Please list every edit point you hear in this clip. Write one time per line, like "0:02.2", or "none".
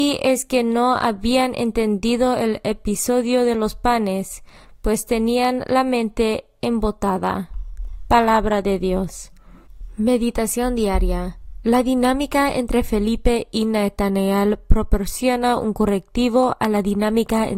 none